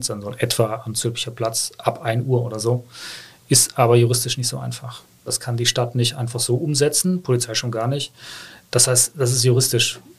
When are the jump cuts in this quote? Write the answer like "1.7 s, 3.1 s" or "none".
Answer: 5.3 s

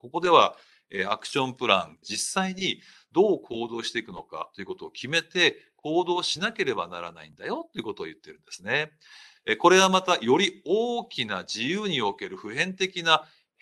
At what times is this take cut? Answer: 2.0 s

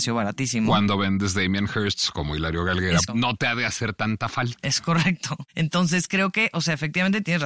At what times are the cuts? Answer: 3.1 s

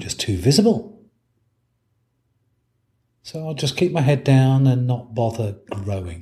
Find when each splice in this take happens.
none

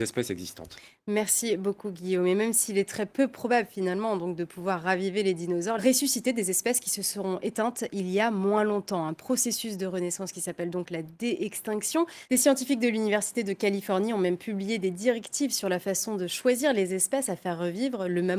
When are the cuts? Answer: 5.8 s

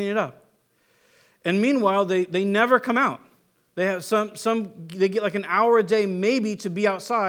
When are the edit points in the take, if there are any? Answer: none

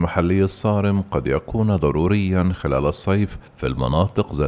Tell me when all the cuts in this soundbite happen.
3.5 s

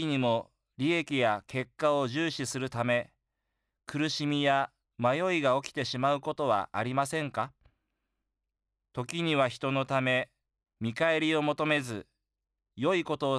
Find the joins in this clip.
10.6 s

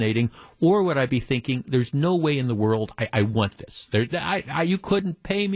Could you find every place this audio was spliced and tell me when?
none

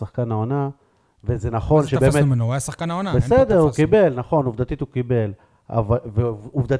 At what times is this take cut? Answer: none

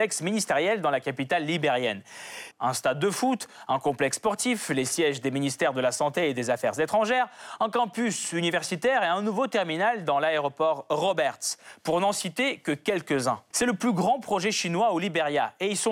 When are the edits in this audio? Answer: 2.5 s, 13.5 s

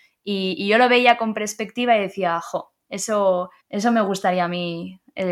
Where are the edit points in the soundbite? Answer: 3.6 s

